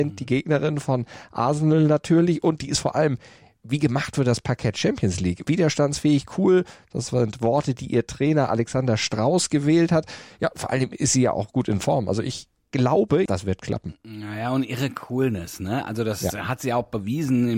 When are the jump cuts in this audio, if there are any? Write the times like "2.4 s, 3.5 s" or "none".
13.3 s